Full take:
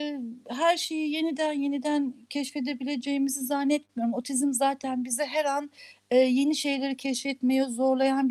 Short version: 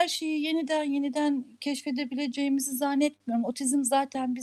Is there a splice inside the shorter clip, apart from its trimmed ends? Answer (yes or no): no